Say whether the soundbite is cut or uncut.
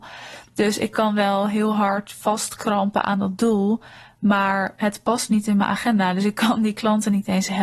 uncut